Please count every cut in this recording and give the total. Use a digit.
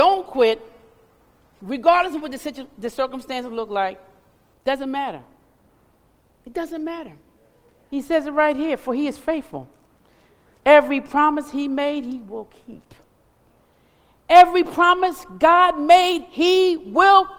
0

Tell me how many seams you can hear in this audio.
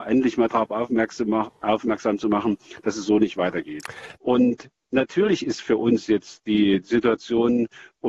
1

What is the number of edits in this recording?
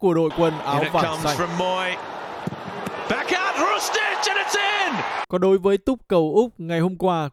1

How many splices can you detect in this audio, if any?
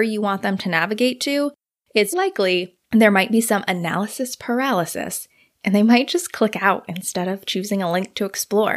1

